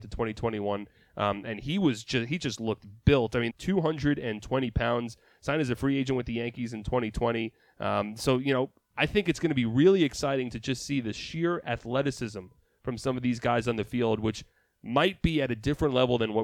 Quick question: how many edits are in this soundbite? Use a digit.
1